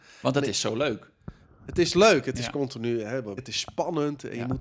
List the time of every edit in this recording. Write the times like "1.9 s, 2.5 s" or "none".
3.4 s